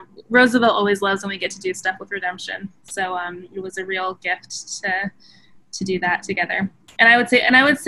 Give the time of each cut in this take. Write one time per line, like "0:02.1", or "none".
none